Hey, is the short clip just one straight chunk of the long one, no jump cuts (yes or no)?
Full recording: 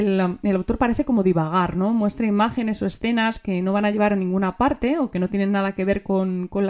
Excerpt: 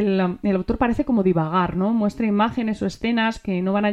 yes